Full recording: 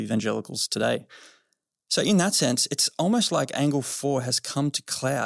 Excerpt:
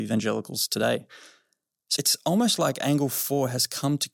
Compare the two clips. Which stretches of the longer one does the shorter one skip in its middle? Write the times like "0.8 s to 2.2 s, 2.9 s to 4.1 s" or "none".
2.0 s to 2.7 s